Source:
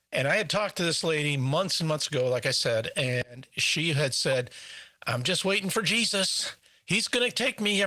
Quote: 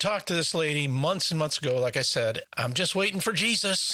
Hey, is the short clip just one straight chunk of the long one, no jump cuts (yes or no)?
no